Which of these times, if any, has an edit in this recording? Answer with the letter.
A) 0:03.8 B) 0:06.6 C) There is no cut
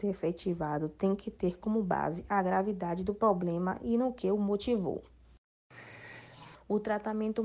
B